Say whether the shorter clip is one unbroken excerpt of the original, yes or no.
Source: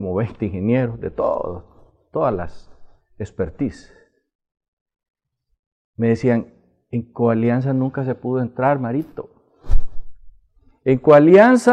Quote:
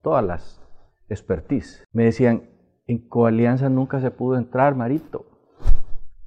no